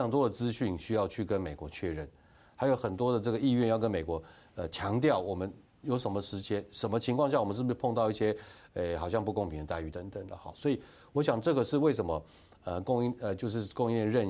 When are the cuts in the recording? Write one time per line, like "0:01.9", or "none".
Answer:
none